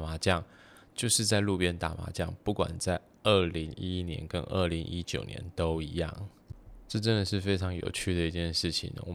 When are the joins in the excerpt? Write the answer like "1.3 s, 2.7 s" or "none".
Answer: none